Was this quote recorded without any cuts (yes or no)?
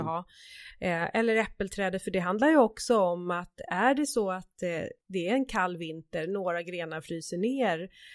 no